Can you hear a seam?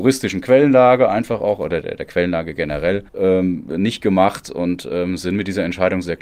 yes; 2 cuts; at 1.8 s, 3.1 s

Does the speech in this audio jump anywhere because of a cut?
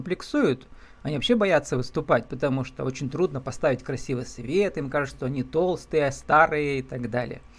no; 0 cuts

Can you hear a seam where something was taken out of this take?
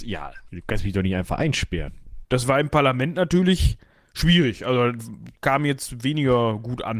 yes; 1 cut; at 2.2 s

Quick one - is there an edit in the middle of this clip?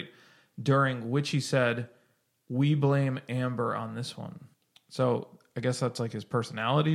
no; 0 cuts

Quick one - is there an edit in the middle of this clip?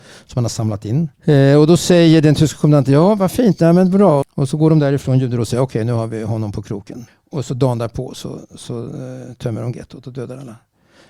yes; 3 cuts; at 1.1 s, 4.2 s, 7.1 s

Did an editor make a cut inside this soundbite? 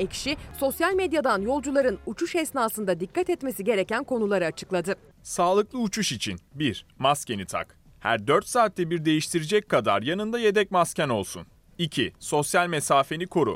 no; 0 cuts

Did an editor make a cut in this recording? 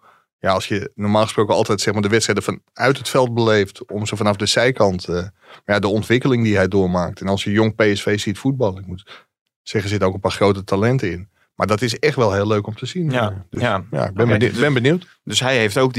no; 0 cuts

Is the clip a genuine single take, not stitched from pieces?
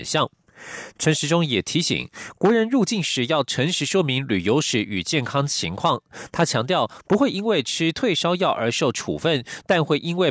yes; 0 cuts

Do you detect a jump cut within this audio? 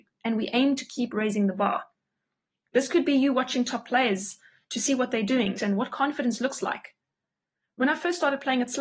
yes; 1 cut; at 5.6 s

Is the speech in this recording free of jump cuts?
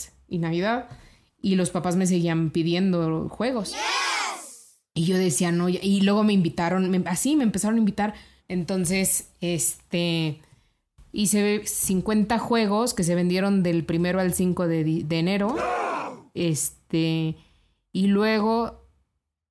no; 1 cut; at 8.4 s

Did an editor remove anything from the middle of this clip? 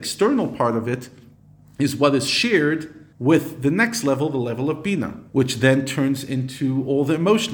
yes; 2 cuts; at 3.1 s, 5.3 s

